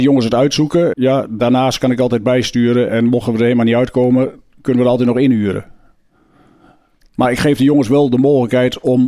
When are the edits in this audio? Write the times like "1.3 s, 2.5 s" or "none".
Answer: 0.9 s